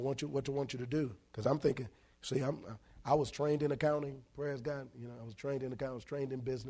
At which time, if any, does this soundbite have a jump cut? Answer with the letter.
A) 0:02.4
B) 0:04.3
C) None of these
C